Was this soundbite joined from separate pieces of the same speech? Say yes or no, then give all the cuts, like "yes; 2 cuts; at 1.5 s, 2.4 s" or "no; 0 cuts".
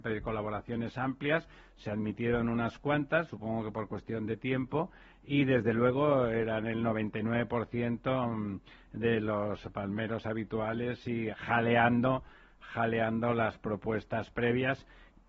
yes; 1 cut; at 11.3 s